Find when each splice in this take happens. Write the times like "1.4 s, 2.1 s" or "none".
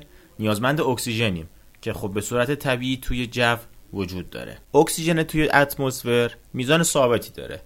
4.6 s